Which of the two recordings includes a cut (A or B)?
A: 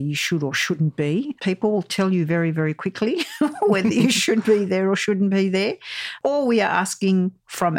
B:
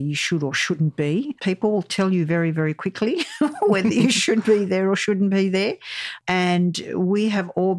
B